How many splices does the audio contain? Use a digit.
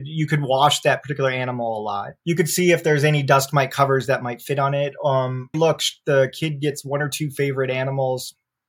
2